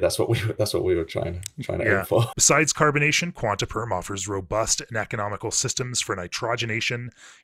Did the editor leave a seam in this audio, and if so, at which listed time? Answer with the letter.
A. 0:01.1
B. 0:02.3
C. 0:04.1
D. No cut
B